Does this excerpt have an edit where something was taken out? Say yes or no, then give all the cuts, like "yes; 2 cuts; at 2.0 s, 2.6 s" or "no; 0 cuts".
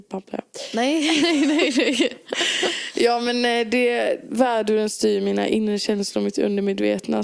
no; 0 cuts